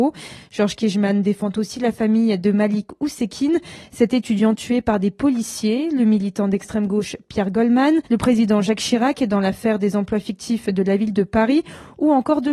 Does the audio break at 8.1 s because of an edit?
yes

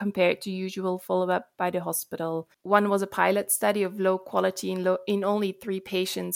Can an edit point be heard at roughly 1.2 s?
no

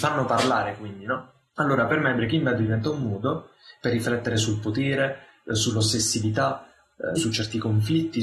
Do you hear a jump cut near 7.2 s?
yes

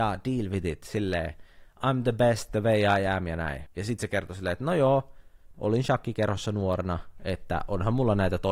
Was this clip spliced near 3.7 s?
yes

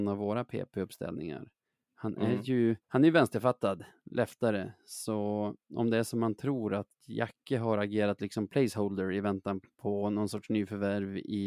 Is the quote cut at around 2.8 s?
yes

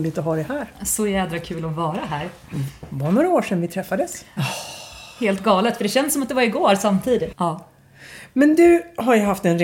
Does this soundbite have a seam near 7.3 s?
yes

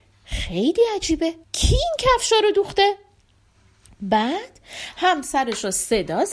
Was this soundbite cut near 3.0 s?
no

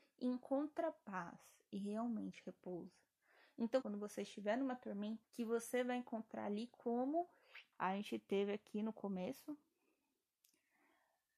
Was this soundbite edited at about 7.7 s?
yes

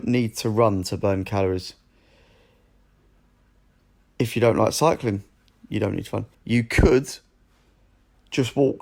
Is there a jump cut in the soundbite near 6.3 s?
yes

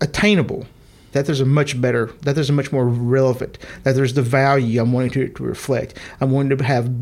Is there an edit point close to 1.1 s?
yes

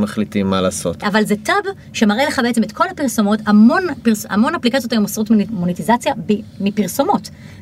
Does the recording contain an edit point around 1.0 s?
yes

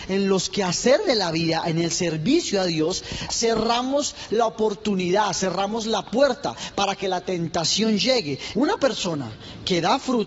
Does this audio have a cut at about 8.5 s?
yes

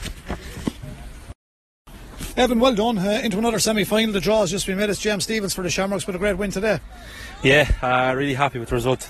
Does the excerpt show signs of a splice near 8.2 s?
no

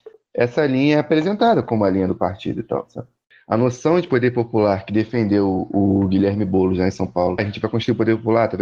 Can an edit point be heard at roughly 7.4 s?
yes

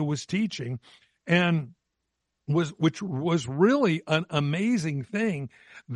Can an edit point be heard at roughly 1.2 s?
no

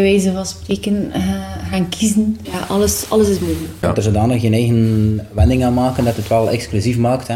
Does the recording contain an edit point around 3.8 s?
yes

